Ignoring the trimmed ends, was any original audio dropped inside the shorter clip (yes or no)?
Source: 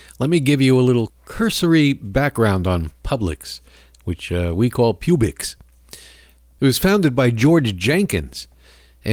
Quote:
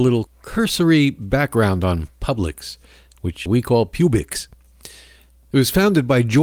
yes